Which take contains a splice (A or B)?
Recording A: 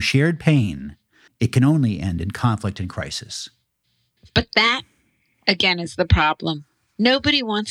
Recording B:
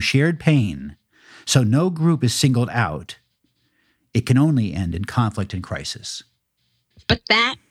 A